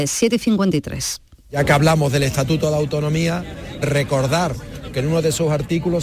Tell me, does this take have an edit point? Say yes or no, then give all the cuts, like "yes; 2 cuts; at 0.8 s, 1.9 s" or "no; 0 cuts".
yes; 2 cuts; at 1.3 s, 3.8 s